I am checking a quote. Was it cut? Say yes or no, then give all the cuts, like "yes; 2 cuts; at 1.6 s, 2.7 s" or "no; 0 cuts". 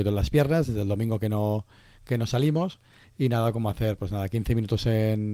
yes; 1 cut; at 3.0 s